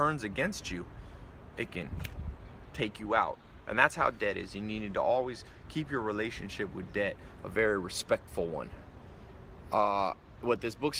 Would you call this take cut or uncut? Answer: uncut